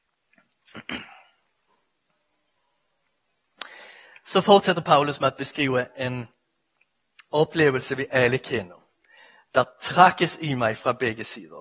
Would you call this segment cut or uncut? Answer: uncut